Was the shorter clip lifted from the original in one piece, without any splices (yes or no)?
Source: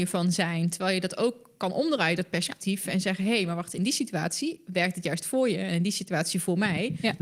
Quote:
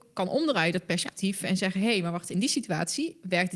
yes